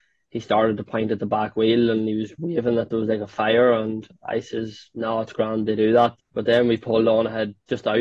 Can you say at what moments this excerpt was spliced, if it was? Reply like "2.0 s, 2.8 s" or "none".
6.2 s